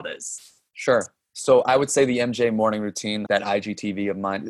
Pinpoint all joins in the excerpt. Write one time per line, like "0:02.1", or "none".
0:03.3